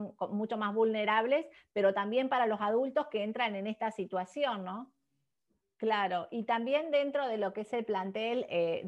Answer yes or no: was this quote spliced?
yes